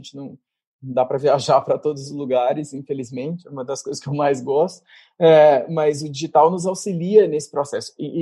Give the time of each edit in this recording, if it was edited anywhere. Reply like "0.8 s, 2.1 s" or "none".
none